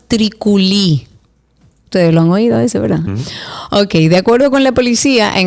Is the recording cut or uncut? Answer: cut